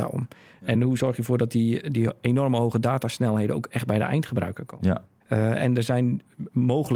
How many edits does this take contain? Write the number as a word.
one